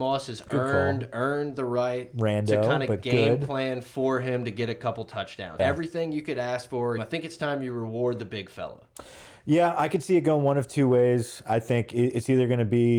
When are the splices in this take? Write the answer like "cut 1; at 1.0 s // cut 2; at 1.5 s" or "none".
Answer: cut 1; at 5.6 s // cut 2; at 7.0 s